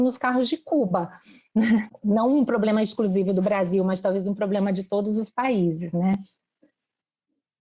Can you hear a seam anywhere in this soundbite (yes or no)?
yes